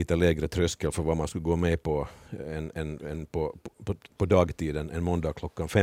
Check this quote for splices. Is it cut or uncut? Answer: uncut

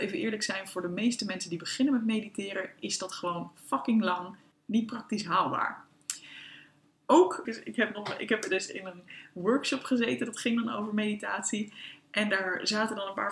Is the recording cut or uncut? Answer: cut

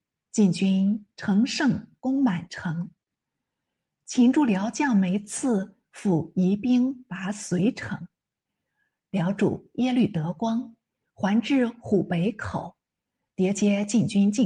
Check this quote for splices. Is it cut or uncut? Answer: uncut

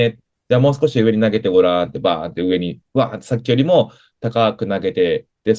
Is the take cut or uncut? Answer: uncut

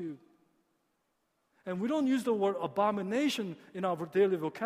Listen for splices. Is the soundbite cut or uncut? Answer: uncut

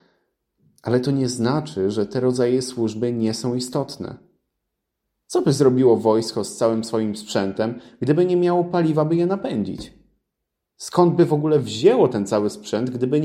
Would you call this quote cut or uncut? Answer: uncut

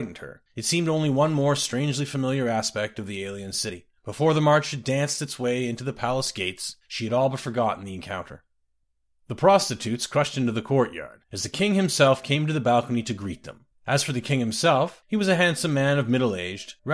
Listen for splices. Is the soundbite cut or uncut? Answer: cut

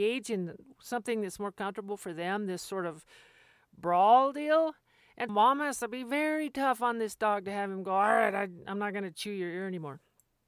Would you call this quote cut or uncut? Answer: cut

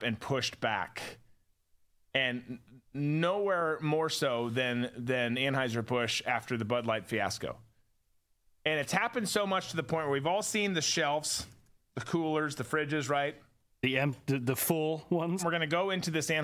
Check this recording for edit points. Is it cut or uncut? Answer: cut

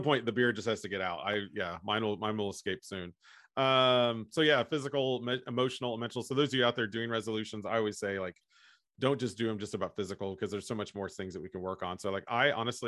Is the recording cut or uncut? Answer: uncut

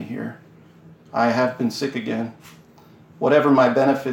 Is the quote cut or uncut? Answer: uncut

